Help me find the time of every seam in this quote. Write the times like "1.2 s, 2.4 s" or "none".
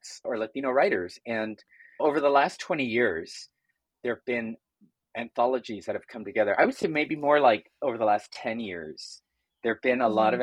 none